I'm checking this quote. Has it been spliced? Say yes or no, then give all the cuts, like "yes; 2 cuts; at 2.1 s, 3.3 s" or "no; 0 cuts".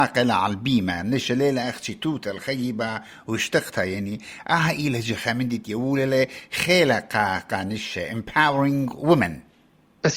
no; 0 cuts